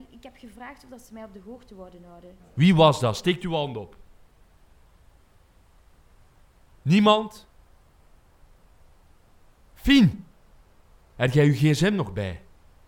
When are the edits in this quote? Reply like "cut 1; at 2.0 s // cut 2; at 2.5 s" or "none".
cut 1; at 2.4 s